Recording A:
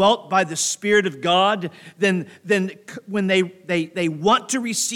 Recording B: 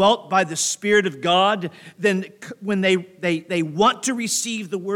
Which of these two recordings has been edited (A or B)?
B